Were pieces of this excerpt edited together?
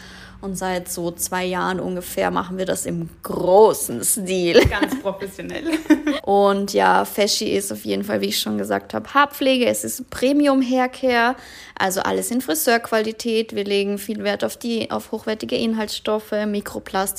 yes; 1 cut; at 6.2 s

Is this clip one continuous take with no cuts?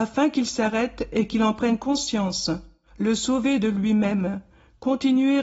yes; 0 cuts

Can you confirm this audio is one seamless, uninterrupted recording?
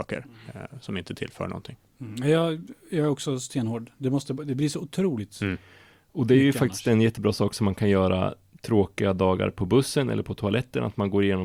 yes; 0 cuts

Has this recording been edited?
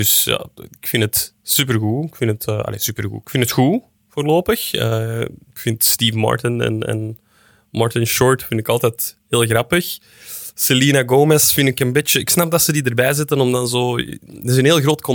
no; 0 cuts

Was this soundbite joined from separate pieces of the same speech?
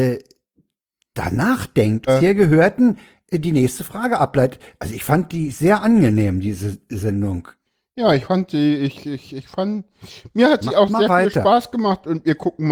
yes; 1 cut; at 2.1 s

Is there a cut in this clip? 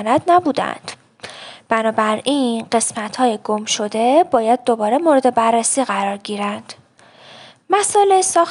no; 0 cuts

